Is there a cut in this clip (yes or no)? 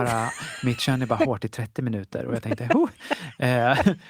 no